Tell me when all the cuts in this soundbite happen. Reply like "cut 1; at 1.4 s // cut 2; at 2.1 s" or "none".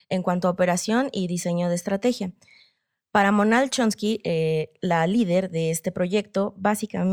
none